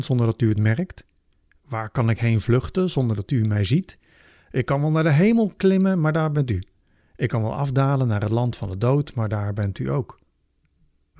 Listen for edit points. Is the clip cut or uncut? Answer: uncut